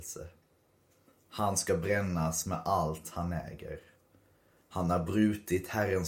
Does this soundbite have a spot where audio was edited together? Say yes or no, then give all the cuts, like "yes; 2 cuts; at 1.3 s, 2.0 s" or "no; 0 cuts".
no; 0 cuts